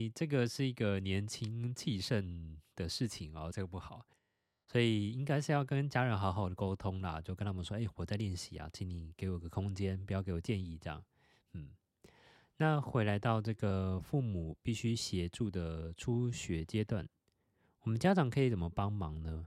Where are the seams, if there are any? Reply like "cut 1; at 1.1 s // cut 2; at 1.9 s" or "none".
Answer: cut 1; at 3.5 s